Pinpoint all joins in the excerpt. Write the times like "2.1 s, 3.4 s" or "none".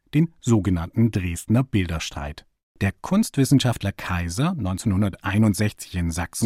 2.7 s